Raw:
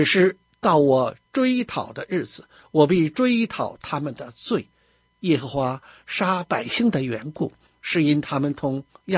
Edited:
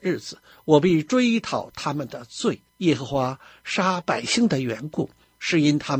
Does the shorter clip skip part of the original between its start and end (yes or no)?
yes